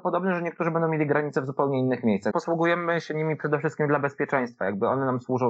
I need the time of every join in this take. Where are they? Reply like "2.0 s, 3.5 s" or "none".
2.3 s

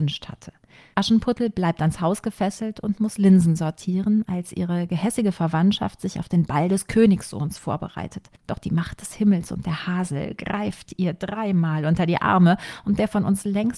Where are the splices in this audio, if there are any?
0.9 s, 8.4 s

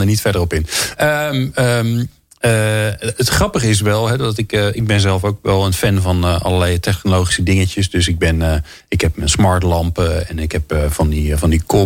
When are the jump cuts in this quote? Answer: none

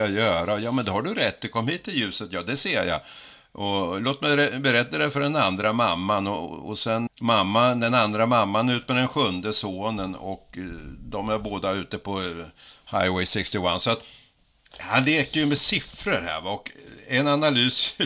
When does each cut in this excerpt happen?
7.1 s

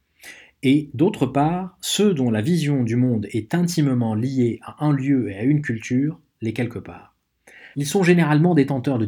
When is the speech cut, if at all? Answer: 7.7 s

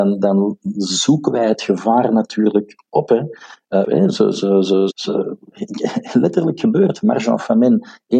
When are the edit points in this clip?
3.8 s, 4.9 s

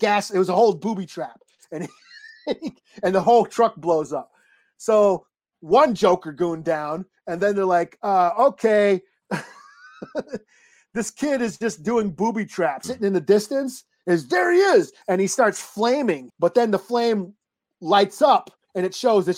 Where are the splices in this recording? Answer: 12.8 s, 16.3 s

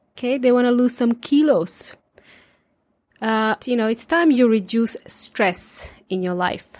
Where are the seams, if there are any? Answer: 3.6 s

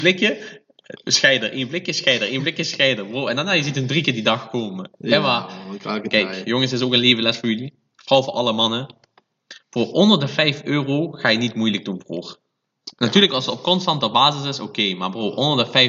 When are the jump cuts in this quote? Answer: 9.6 s

